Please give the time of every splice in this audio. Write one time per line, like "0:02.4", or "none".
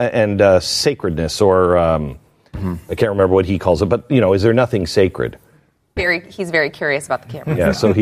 0:06.0